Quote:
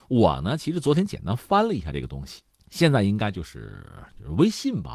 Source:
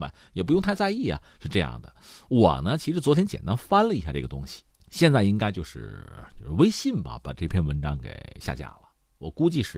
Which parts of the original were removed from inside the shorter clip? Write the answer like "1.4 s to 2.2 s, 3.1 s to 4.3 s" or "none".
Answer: none